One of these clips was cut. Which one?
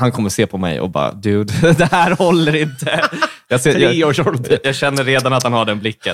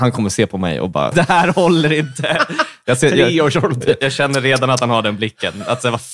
second; 1 cut; at 1.1 s

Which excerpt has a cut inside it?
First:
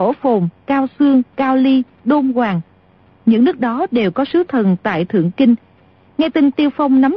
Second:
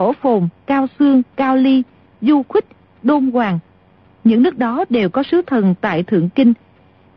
first; 1 cut; at 1.9 s

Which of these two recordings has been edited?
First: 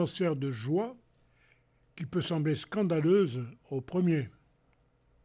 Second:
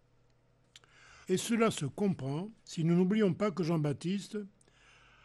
second; 2 cuts; at 1.2 s, 2.6 s

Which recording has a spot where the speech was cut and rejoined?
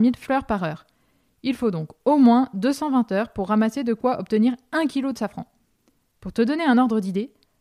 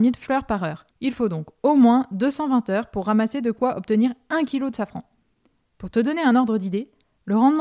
second; 1 cut; at 0.9 s

